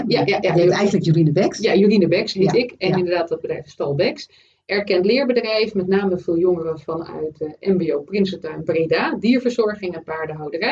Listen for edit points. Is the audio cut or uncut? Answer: uncut